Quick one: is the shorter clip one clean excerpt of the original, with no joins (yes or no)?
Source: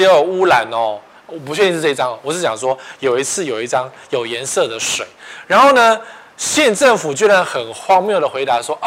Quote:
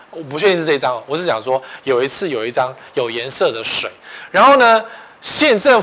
yes